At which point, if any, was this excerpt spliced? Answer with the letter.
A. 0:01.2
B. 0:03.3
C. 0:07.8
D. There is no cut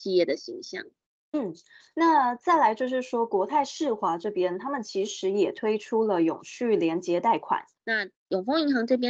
C